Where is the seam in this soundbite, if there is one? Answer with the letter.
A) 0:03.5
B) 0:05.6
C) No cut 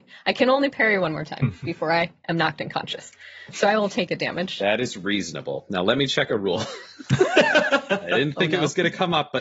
C